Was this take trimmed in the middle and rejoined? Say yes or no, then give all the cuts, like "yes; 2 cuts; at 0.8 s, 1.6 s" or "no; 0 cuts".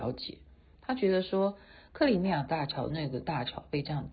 no; 0 cuts